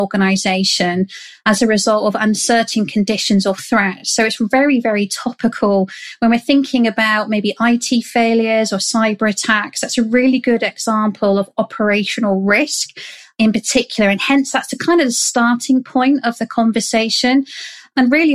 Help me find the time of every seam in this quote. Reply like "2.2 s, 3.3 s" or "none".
none